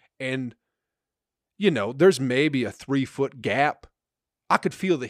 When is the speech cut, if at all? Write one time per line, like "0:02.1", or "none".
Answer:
none